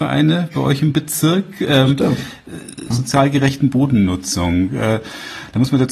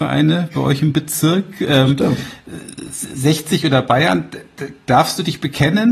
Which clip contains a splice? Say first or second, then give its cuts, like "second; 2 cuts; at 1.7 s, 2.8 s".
first; 1 cut; at 2.9 s